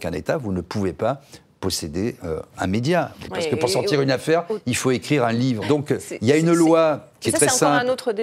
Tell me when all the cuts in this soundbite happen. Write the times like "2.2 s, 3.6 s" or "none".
3.3 s, 5.6 s